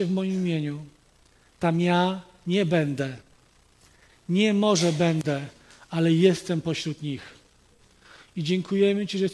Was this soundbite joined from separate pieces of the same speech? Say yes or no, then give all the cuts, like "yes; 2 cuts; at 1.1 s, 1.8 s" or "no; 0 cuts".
no; 0 cuts